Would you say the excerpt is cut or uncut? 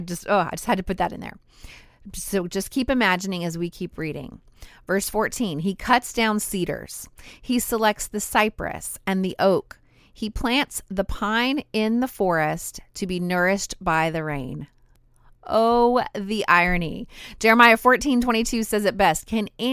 uncut